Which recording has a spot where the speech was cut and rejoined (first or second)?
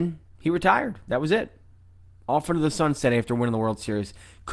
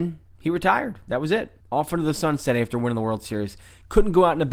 second